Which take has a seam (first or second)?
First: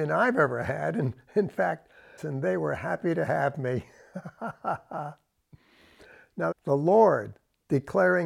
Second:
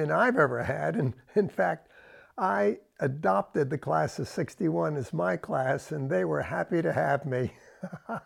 first